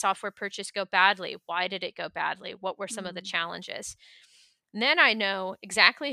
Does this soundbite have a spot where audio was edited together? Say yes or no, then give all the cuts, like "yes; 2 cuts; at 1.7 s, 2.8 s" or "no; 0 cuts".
no; 0 cuts